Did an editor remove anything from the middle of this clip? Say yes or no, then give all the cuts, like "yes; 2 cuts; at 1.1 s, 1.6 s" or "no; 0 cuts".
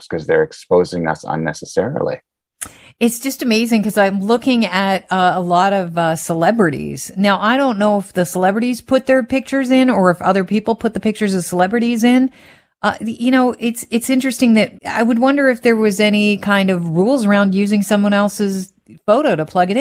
yes; 1 cut; at 14.8 s